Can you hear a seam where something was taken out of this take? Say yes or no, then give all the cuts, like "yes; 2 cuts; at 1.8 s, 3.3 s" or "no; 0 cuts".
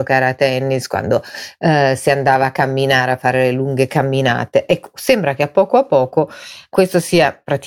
no; 0 cuts